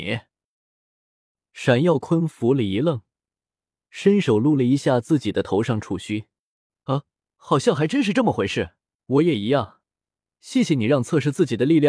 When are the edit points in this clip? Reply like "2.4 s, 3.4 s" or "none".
9.0 s